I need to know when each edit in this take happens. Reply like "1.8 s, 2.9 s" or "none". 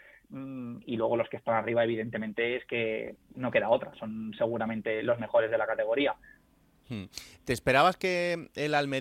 3.2 s